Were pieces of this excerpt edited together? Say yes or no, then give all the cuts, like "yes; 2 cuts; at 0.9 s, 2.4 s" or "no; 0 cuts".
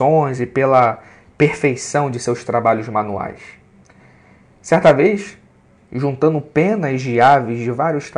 yes; 1 cut; at 5.8 s